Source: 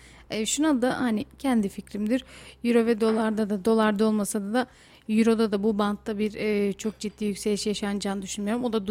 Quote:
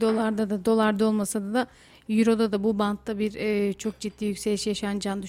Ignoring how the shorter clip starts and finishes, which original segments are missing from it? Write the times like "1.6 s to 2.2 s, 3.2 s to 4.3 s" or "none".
none